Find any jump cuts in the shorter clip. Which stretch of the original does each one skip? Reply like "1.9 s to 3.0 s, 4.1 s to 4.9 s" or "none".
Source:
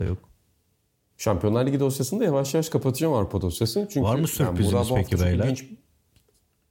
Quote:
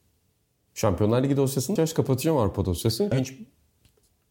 2.2 s to 2.5 s, 3.9 s to 5.4 s

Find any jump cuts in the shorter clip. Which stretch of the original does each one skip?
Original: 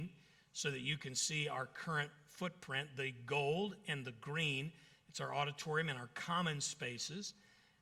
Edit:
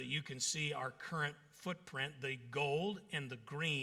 none

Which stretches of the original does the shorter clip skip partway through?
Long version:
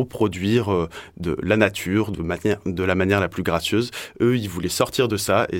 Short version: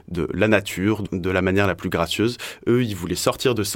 2.2 s to 2.6 s

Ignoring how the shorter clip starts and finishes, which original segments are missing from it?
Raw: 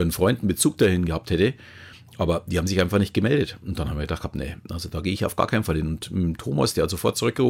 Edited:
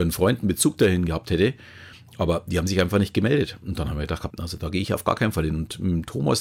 4.3 s to 4.6 s

